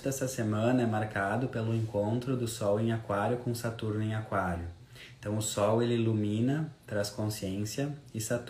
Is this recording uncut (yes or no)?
yes